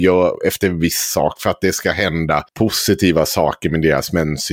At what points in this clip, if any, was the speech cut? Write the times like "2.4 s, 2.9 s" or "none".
2.5 s